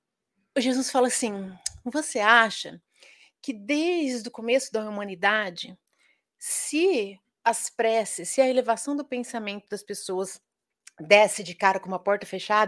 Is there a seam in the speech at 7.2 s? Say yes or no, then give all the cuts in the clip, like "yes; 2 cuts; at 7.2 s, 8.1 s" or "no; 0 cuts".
yes; 1 cut; at 7.2 s